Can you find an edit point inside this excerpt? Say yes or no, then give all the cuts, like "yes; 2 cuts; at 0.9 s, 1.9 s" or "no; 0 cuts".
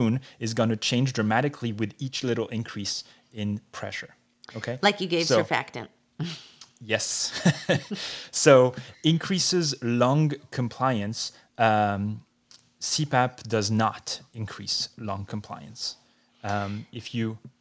no; 0 cuts